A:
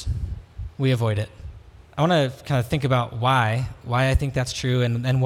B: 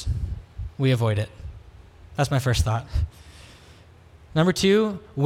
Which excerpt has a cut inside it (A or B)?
A